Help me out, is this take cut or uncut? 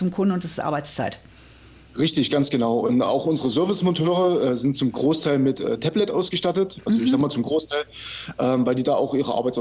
uncut